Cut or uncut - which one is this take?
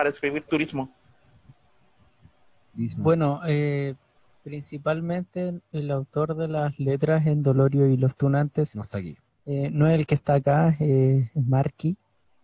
uncut